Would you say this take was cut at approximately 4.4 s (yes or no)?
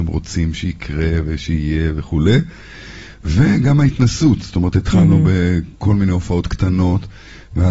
no